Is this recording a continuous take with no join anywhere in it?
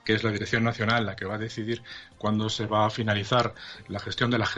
yes; 0 cuts

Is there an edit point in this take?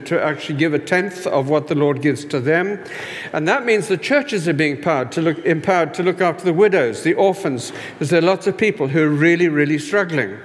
no; 0 cuts

